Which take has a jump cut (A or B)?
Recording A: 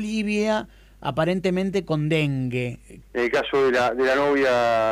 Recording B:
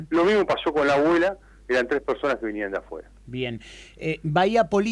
A